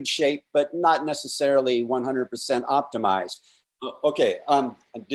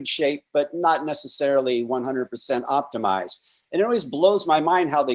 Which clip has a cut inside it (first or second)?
first